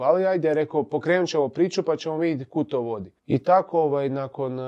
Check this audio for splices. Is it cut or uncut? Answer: cut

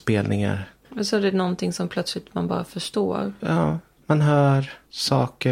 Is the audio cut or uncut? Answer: cut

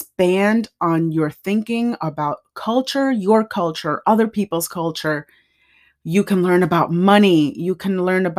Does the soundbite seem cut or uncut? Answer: uncut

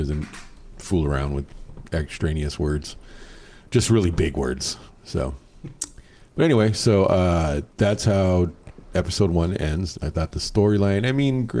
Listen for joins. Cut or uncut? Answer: cut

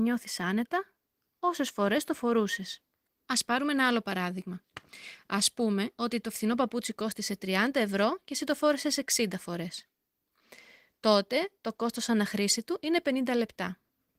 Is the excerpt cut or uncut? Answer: uncut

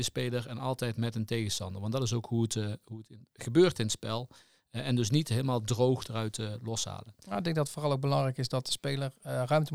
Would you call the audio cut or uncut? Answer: uncut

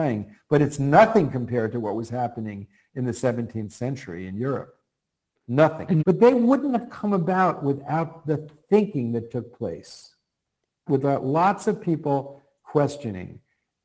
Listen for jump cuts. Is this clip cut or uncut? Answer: cut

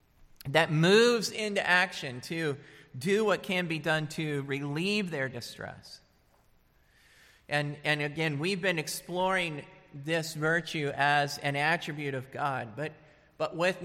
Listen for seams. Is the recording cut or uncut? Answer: uncut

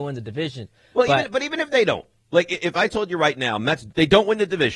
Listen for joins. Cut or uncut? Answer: uncut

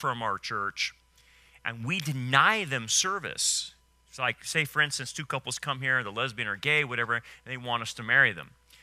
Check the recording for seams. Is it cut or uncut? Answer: uncut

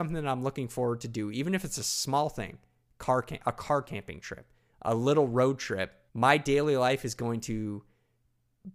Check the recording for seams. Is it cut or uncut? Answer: cut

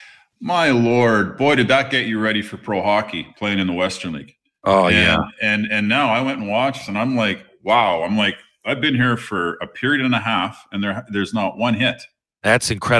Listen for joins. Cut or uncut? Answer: uncut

